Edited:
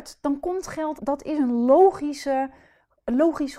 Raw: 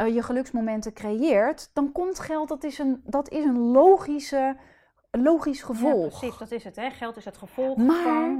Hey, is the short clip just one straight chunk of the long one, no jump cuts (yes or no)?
no